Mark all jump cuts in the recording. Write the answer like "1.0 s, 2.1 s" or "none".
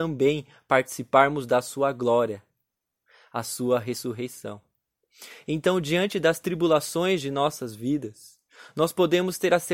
none